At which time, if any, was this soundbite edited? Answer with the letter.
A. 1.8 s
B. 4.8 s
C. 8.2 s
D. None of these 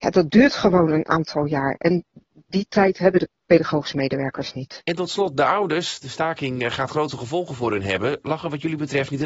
D